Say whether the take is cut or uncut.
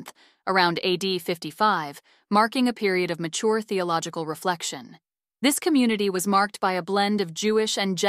cut